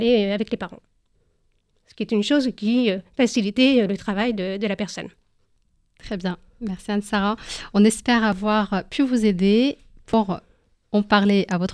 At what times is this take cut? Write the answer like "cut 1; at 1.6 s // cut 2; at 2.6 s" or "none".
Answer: none

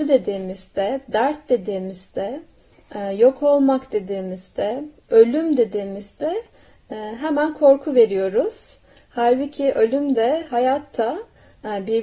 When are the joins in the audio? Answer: none

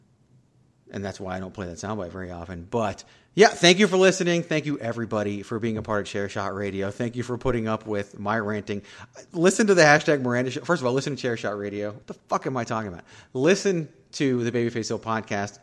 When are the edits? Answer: cut 1; at 12.0 s

